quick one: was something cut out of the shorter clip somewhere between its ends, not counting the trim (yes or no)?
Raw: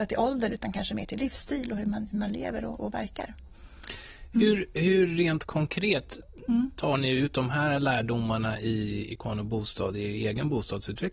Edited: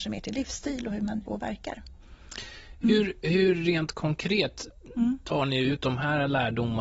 yes